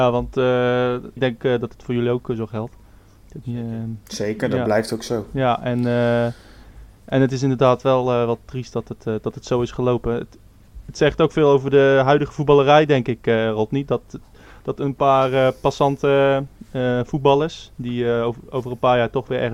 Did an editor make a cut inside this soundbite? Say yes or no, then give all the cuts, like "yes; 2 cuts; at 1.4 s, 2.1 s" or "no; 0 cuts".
yes; 1 cut; at 1.2 s